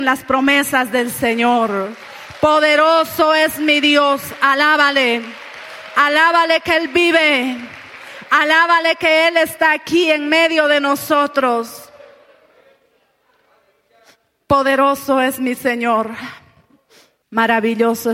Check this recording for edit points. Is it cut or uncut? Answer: cut